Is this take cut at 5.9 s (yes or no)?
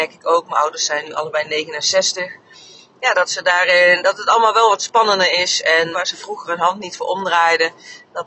yes